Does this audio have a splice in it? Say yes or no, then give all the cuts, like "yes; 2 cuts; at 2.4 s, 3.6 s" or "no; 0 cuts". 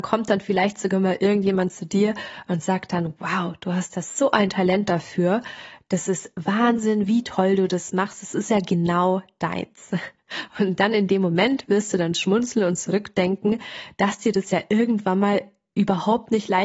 no; 0 cuts